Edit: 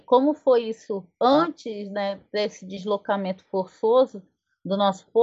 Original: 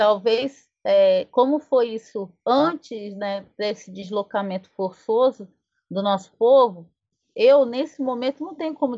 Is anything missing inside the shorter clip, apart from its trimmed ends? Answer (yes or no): no